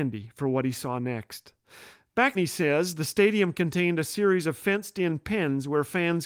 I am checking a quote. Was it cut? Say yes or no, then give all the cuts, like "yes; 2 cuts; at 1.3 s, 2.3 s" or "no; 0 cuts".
yes; 1 cut; at 2.3 s